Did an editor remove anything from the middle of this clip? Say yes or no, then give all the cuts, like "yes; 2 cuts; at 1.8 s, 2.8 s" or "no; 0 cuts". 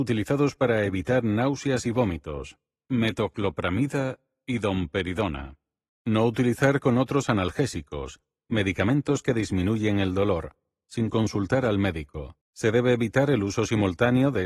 yes; 2 cuts; at 5.9 s, 12.4 s